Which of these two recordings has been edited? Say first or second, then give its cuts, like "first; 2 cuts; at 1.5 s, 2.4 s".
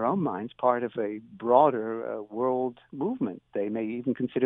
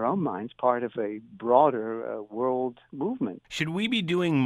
second; 1 cut; at 3.4 s